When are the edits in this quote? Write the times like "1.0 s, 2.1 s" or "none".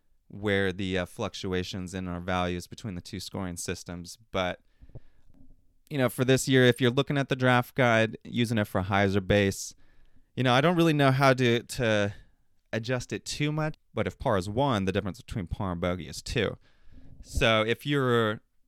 13.7 s